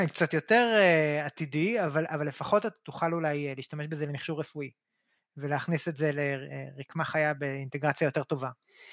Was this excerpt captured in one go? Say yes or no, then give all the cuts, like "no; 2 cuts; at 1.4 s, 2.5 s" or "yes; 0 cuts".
yes; 0 cuts